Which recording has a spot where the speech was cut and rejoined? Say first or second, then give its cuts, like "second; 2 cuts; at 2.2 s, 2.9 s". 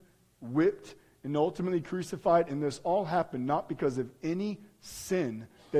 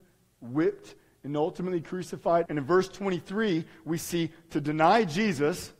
second; 1 cut; at 2.5 s